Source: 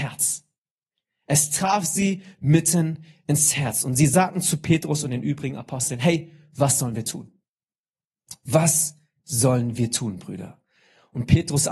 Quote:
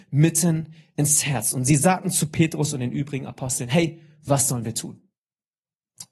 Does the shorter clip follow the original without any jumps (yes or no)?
yes